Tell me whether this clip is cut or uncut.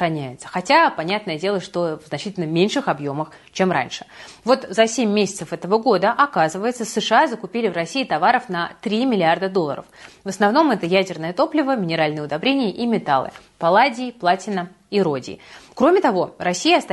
cut